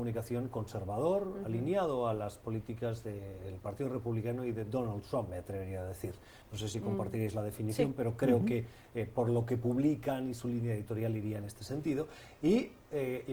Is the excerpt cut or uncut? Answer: uncut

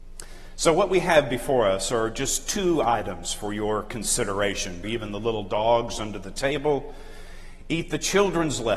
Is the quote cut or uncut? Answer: cut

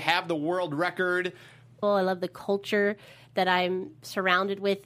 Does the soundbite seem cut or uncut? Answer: cut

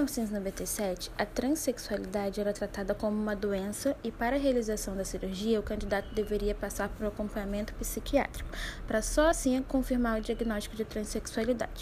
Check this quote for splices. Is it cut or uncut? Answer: uncut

